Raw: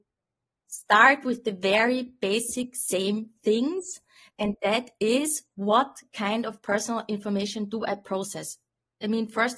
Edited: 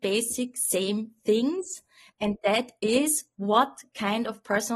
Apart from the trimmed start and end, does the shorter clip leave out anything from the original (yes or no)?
no